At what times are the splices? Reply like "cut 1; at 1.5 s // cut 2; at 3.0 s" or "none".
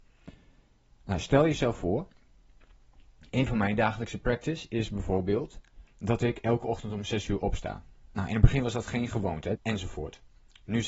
cut 1; at 5.9 s // cut 2; at 9.6 s